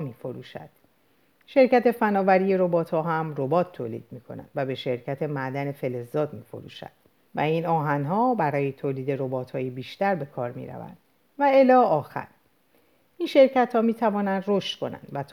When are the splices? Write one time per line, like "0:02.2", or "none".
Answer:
0:07.3